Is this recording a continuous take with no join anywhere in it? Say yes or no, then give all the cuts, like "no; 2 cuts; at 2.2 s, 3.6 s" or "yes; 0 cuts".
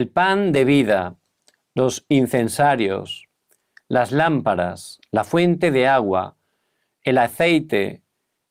yes; 0 cuts